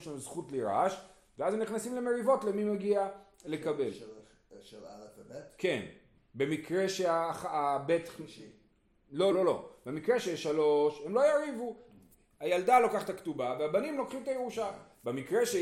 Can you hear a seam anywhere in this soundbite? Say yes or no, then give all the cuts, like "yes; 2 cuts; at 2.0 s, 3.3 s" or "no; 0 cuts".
yes; 1 cut; at 9.3 s